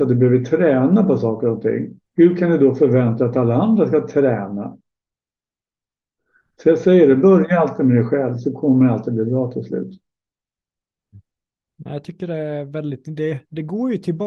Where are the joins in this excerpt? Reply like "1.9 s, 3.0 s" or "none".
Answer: none